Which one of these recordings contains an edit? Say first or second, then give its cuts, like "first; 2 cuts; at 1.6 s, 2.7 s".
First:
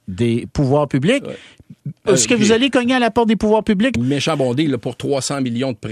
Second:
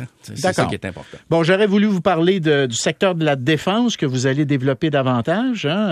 first; 2 cuts; at 2.1 s, 3.9 s